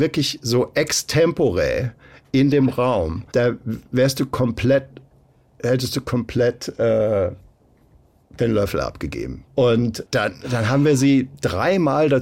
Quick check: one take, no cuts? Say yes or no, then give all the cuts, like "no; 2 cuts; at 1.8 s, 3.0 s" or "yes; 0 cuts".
no; 2 cuts; at 3.3 s, 9.5 s